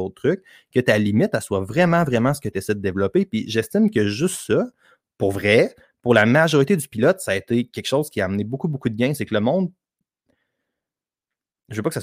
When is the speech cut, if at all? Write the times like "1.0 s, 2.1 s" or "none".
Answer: none